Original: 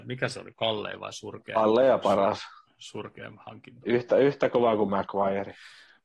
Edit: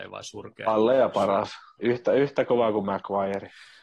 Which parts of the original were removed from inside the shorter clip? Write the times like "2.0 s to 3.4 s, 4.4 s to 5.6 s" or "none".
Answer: 2.7 s to 3.8 s